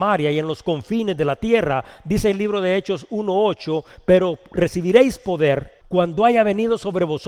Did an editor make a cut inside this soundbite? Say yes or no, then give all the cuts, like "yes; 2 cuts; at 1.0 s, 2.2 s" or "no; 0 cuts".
yes; 1 cut; at 5.8 s